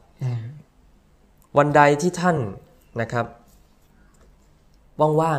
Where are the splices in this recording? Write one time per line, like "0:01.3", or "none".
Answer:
none